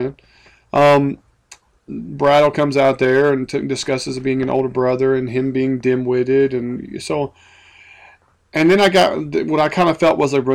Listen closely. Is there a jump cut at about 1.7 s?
yes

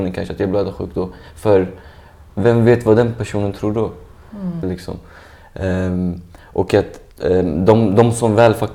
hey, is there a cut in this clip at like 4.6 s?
yes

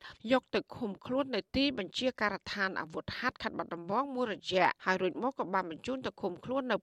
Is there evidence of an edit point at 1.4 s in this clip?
no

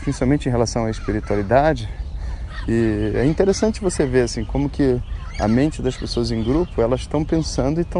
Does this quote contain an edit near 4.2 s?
no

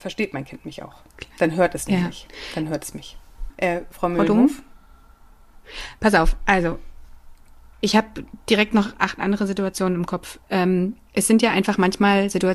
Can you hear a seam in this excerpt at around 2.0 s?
no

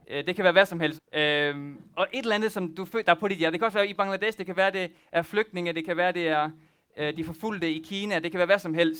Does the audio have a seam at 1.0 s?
yes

